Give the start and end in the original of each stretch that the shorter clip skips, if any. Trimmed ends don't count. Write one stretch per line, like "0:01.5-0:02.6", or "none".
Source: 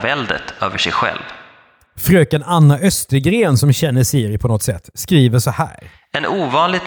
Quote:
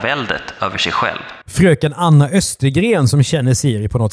0:01.4-0:01.9